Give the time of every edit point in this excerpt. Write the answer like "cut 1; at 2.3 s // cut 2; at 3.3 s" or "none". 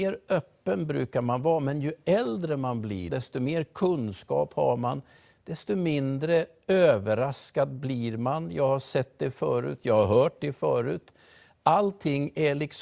cut 1; at 3.1 s